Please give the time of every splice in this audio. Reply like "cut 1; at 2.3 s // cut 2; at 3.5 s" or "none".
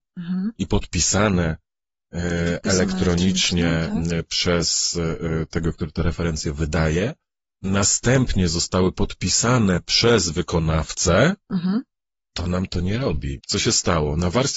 cut 1; at 12.2 s // cut 2; at 13.4 s

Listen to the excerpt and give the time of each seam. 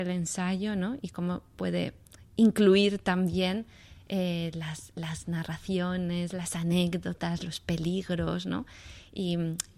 none

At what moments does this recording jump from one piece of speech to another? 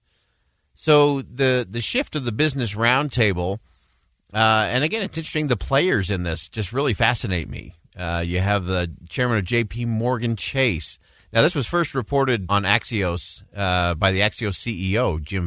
cut 1; at 11.2 s // cut 2; at 12.5 s

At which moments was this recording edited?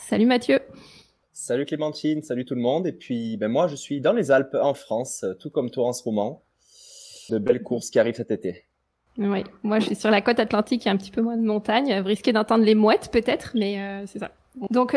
cut 1; at 7.3 s

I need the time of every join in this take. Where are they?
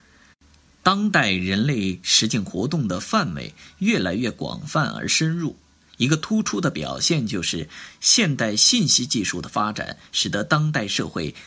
none

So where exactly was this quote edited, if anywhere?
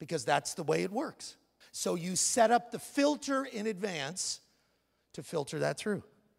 cut 1; at 1.6 s

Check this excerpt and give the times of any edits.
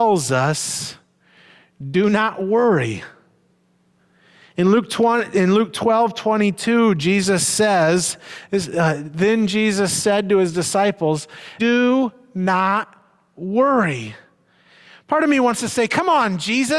cut 1; at 11.6 s

